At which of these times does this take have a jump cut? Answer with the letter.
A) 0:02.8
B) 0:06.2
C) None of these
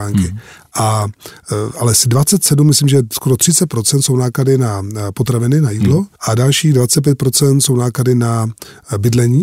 B